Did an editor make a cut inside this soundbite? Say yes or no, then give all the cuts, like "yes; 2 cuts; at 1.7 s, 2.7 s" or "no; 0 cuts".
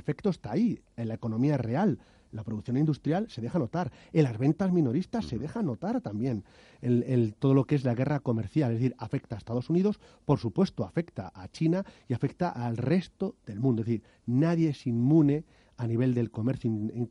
no; 0 cuts